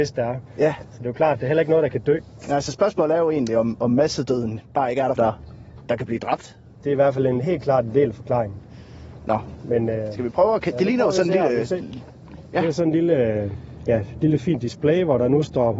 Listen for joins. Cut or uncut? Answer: cut